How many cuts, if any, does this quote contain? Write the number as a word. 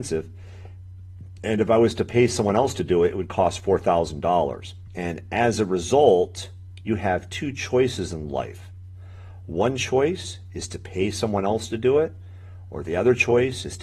one